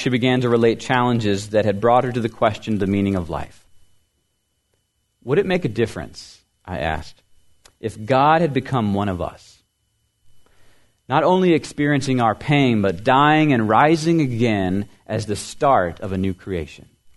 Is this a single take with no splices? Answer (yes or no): yes